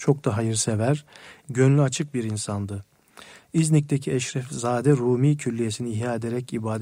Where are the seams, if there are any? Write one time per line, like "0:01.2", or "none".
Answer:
0:01.4